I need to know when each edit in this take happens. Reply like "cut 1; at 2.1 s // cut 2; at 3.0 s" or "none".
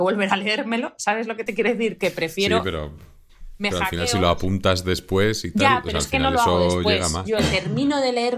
cut 1; at 7.2 s